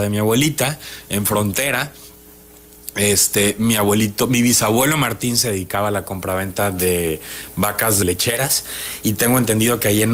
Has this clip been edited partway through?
yes; 1 cut; at 8.0 s

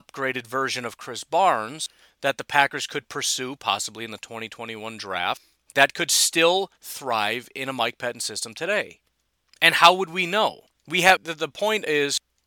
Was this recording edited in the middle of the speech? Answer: yes; 1 cut; at 11.2 s

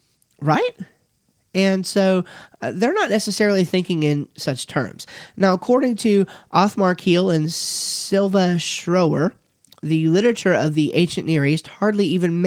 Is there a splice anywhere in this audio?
no; 0 cuts

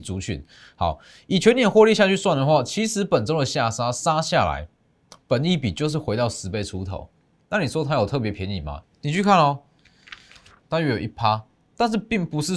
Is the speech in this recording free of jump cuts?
no; 2 cuts; at 8.8 s, 10.6 s

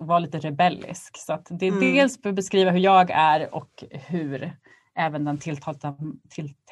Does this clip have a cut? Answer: no; 0 cuts

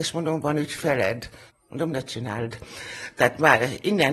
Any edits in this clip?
yes; 1 cut; at 1.5 s

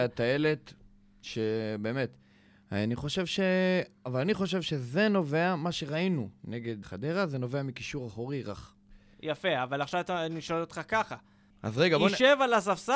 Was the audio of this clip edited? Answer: yes; 2 cuts; at 6.8 s, 11.5 s

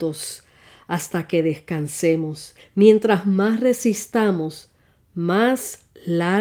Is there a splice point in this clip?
yes; 1 cut; at 2.6 s

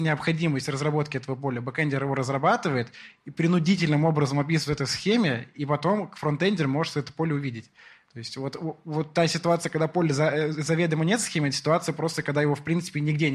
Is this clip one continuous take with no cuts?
yes; 0 cuts

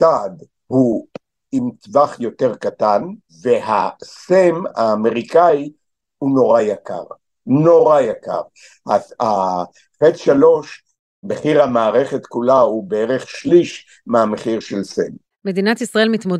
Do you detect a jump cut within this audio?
no; 0 cuts

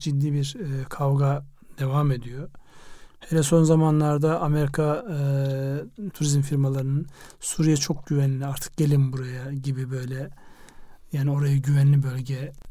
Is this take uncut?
no; 1 cut; at 6.1 s

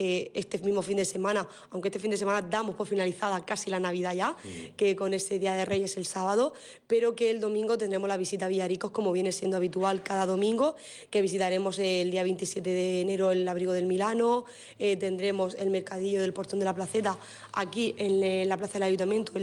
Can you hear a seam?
yes; 1 cut; at 11.1 s

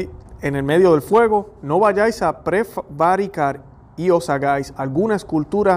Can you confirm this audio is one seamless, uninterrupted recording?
yes; 0 cuts

